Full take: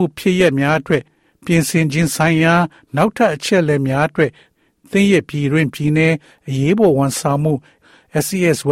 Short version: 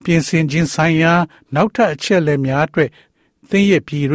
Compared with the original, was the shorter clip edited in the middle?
no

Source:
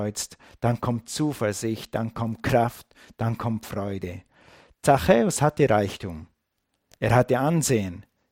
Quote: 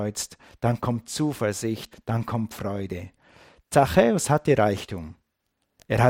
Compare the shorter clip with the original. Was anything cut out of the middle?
yes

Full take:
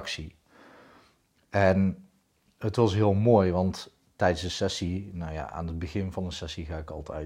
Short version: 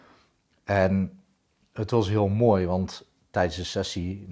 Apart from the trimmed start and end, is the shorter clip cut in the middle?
no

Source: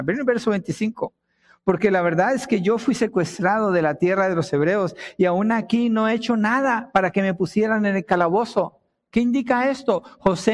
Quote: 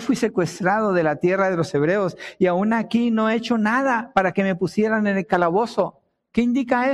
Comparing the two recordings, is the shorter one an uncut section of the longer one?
yes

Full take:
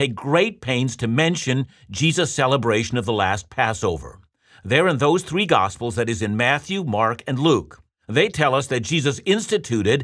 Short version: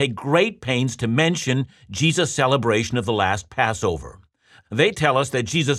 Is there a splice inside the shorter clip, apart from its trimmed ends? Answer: yes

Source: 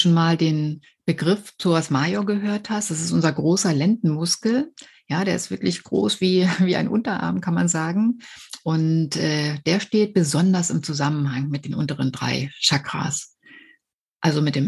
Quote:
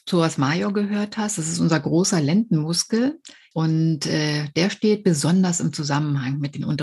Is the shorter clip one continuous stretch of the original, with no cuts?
no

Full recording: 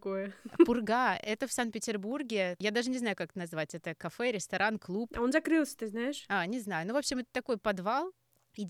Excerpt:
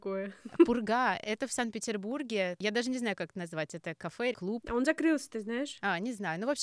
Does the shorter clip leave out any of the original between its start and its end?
yes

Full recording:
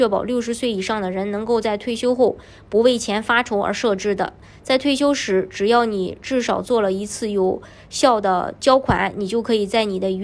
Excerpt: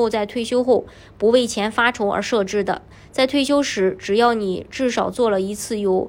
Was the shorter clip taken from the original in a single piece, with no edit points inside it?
yes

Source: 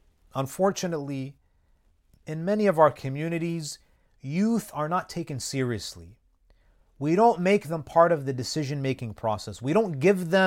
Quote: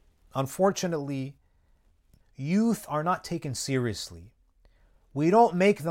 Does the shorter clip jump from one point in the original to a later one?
yes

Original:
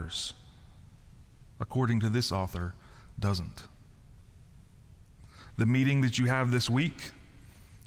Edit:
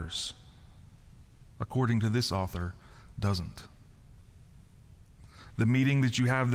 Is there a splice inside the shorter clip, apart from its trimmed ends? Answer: no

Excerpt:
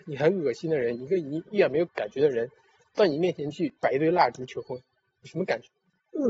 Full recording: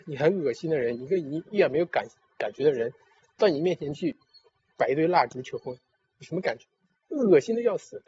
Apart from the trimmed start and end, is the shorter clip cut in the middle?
yes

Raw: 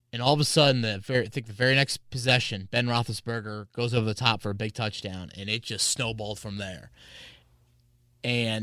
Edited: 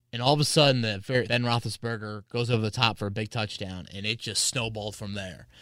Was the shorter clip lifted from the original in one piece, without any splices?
no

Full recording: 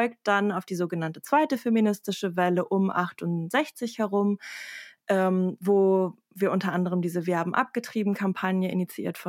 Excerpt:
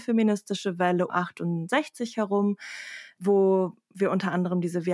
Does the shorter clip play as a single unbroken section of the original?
no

